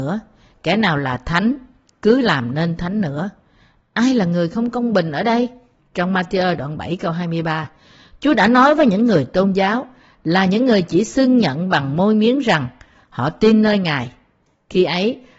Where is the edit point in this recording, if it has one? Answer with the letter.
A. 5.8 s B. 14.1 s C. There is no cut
A